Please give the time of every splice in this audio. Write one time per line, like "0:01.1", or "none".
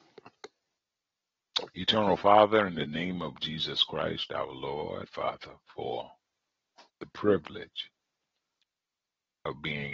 0:05.1

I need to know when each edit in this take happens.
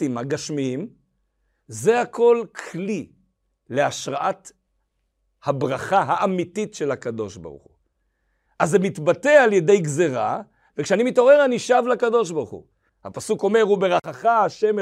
0:08.5
0:10.7
0:12.9

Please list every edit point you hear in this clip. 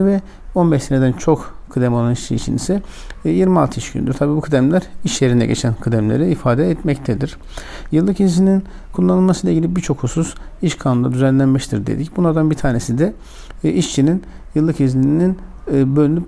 none

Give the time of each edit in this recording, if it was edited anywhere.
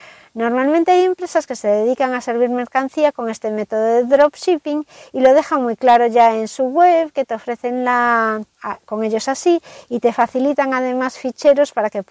0:08.5

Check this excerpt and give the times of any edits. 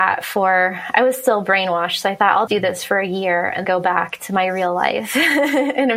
0:02.5
0:03.6

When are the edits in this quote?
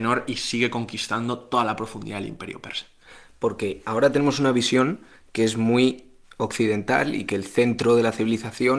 none

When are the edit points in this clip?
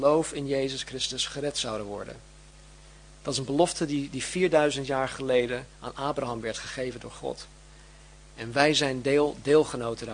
none

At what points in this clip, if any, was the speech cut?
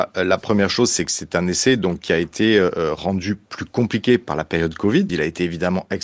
0:05.1

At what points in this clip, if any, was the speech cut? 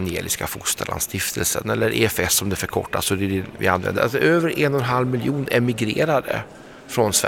0:04.0

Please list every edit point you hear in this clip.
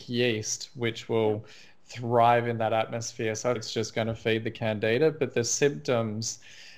0:03.5

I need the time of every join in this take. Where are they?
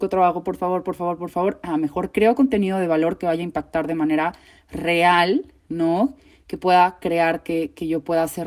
none

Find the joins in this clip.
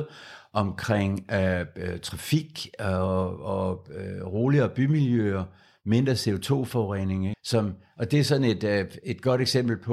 0:07.3

